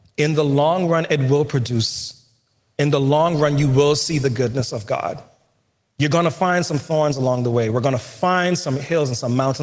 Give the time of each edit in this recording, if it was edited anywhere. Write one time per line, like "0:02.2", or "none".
none